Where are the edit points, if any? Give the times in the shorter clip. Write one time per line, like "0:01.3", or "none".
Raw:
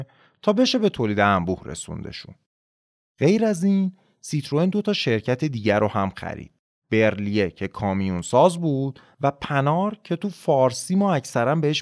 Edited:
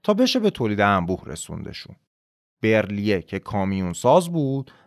0:02.6